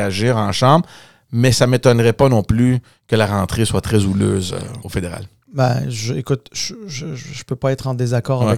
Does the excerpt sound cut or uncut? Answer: cut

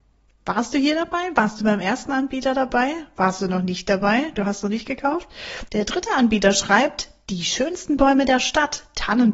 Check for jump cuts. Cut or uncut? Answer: cut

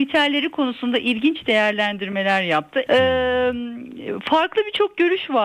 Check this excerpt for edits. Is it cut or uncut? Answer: cut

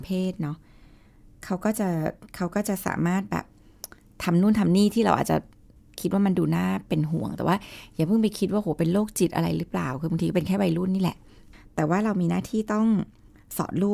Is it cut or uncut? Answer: uncut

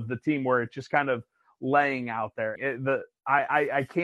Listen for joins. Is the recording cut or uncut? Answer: cut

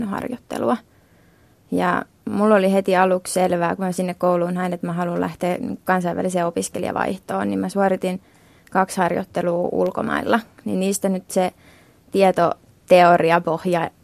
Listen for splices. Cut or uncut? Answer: uncut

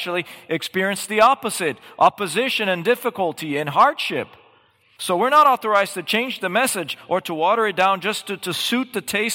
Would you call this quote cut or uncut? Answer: uncut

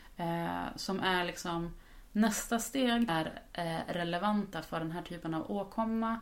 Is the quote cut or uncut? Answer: cut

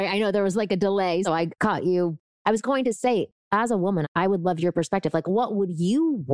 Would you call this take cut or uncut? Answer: cut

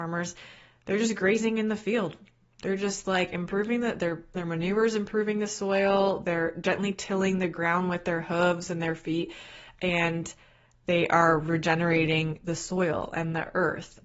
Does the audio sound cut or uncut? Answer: uncut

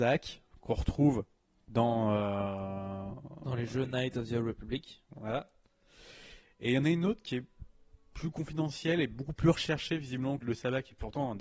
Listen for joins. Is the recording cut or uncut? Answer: cut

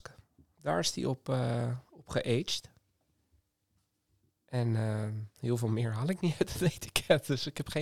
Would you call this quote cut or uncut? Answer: uncut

